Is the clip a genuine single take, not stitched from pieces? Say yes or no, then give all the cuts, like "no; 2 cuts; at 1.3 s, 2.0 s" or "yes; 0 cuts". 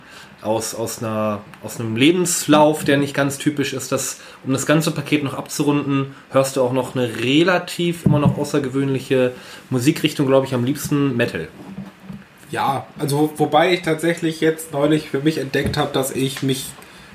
yes; 0 cuts